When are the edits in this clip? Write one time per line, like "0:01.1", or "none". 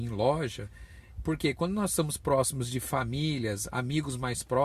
0:01.2